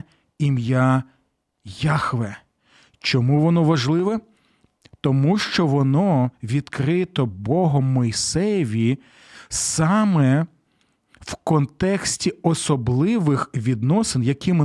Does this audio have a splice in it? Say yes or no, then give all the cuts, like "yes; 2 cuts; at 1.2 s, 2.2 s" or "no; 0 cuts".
no; 0 cuts